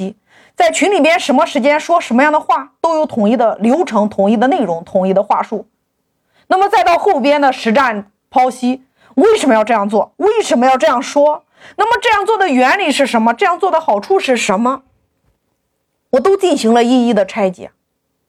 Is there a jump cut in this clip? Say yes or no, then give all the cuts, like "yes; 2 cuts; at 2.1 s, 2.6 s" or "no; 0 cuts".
no; 0 cuts